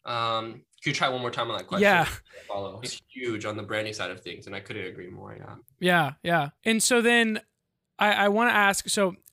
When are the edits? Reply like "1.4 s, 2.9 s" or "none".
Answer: 2.8 s, 6.6 s